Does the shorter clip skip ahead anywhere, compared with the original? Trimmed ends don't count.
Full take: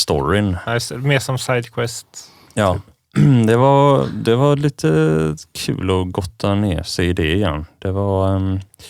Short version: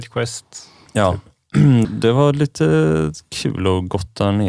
yes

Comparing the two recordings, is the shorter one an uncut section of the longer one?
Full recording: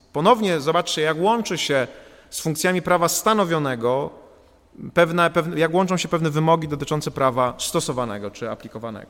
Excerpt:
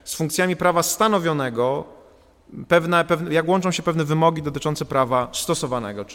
yes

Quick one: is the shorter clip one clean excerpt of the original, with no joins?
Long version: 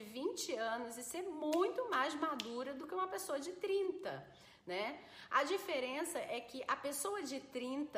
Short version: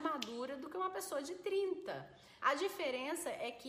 no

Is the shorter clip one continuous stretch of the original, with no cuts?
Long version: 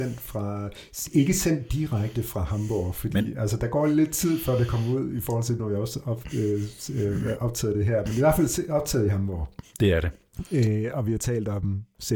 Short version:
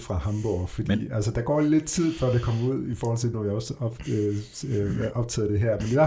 yes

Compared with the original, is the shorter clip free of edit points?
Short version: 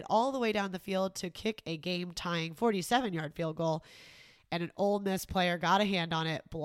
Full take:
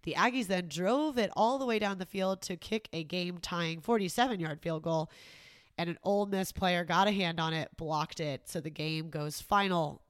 yes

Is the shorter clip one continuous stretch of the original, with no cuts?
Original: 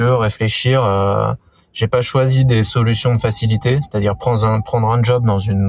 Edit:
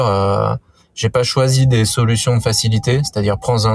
yes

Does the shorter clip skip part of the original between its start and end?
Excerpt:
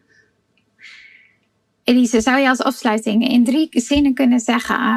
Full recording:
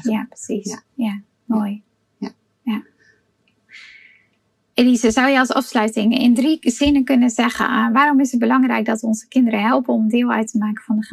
no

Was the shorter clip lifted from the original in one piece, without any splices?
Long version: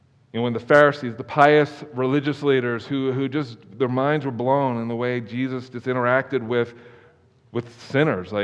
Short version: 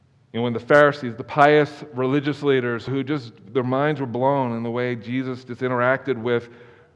no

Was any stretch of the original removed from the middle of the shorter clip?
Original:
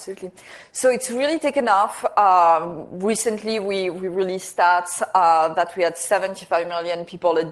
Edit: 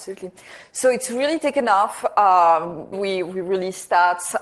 yes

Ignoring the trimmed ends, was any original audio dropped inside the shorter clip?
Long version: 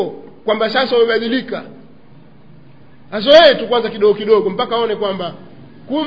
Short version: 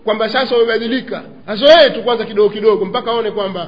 yes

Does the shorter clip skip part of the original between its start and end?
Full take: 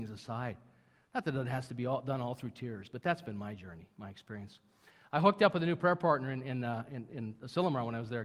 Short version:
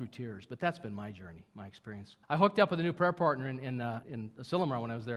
yes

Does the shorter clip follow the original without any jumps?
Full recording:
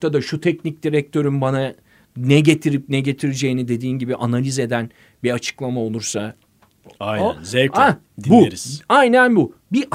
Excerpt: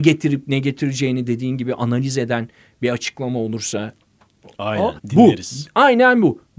no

